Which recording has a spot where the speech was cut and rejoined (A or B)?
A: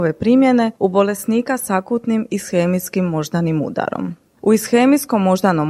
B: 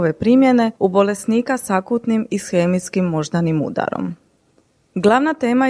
A